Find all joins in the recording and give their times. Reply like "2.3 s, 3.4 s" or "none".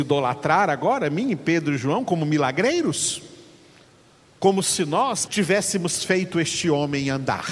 4.2 s, 5.3 s